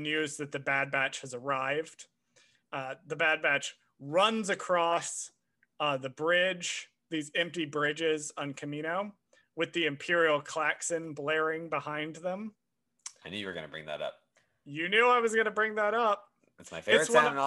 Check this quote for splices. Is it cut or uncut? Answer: uncut